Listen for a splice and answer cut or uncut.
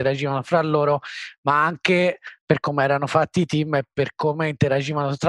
uncut